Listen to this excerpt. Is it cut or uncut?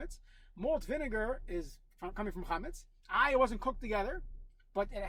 uncut